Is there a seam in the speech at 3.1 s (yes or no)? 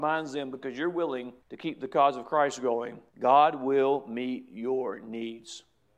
yes